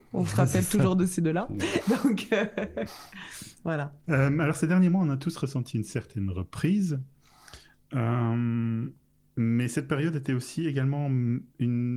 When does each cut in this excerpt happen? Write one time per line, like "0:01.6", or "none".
none